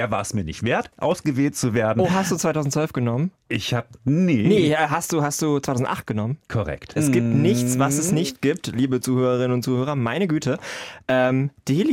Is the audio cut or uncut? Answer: cut